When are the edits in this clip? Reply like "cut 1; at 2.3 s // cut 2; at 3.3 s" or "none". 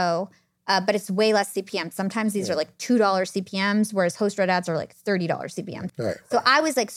cut 1; at 5.9 s